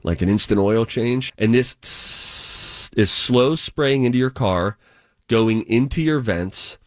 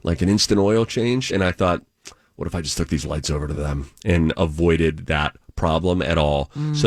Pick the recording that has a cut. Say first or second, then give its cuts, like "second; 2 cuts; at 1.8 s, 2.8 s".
first; 1 cut; at 1.3 s